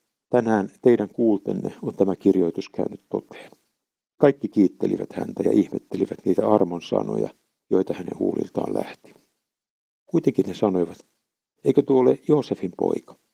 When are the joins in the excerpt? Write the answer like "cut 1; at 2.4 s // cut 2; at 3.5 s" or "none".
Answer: none